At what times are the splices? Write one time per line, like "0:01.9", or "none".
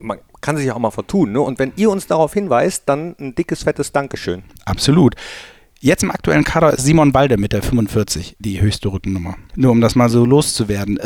none